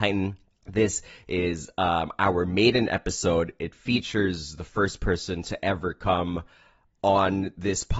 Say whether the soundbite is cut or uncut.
uncut